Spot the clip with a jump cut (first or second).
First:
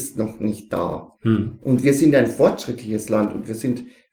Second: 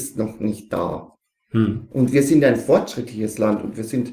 first